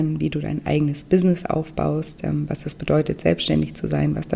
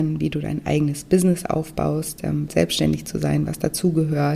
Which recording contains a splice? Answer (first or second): second